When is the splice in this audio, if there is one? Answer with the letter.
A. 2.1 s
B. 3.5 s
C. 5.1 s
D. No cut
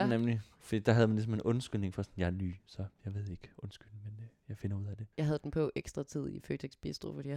C